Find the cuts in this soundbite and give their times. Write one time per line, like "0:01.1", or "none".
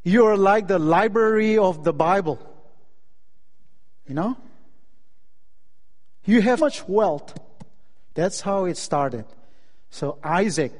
0:06.6
0:08.1